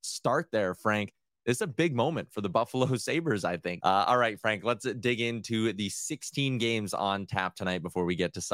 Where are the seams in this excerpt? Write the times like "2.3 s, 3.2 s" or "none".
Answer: 3.8 s